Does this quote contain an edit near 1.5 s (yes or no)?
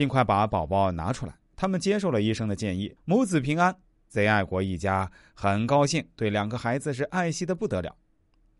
no